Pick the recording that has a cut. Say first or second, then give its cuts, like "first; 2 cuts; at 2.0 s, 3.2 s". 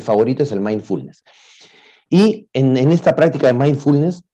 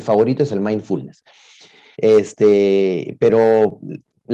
second; 1 cut; at 1.9 s